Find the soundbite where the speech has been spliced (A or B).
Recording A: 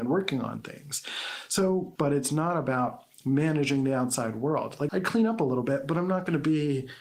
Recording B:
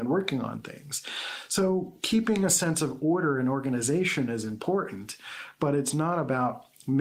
A